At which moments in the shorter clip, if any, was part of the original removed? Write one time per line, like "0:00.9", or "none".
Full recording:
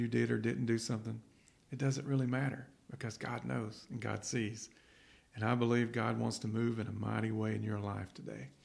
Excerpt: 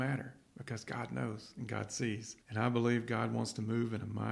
0:02.4